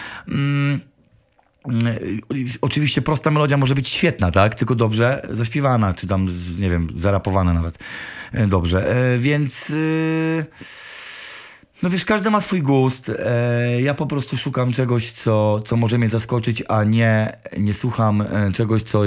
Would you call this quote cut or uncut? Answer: uncut